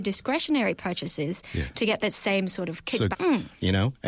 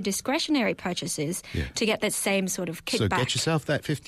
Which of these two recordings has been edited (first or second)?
first